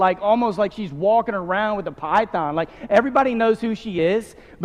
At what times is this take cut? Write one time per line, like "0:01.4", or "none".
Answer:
none